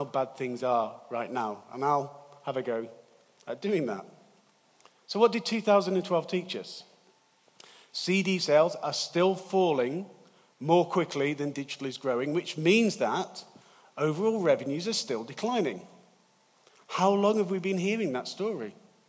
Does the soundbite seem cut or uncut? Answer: uncut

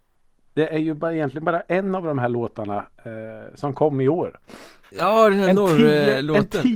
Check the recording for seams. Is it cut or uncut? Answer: cut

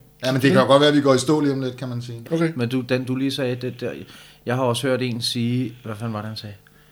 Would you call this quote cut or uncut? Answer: cut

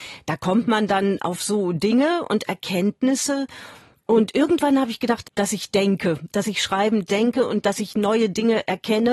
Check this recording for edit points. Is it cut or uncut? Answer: cut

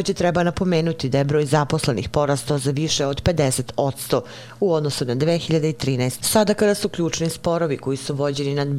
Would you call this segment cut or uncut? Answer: cut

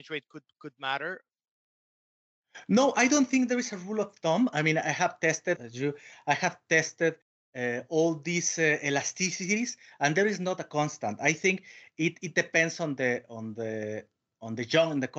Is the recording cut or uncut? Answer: cut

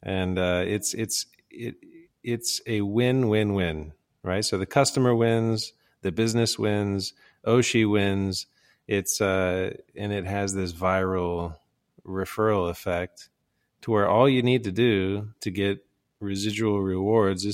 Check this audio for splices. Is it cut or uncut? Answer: uncut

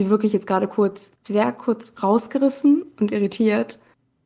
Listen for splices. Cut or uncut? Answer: cut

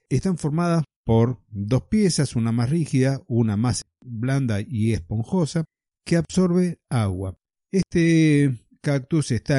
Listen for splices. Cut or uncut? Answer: cut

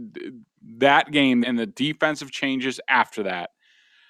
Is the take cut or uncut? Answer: cut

